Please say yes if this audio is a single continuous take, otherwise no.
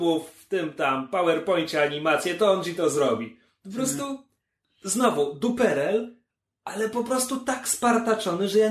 yes